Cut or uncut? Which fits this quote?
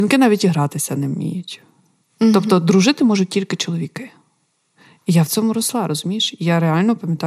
uncut